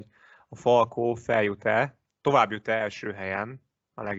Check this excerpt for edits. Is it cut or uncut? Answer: uncut